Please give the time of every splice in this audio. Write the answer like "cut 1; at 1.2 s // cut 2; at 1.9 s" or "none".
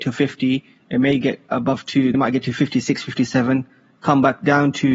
cut 1; at 2.1 s